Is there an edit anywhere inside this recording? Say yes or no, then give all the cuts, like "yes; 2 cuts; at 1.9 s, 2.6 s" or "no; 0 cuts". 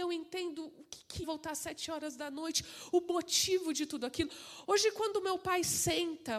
yes; 2 cuts; at 1.2 s, 4.6 s